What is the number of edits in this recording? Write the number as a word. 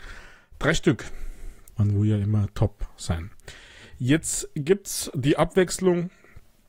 one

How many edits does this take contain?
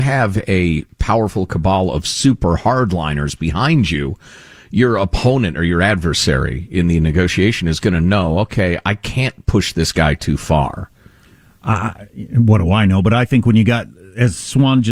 zero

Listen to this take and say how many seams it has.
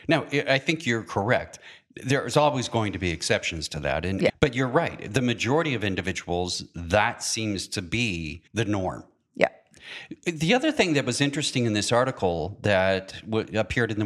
two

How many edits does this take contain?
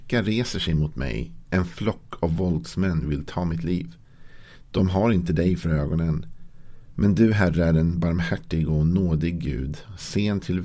zero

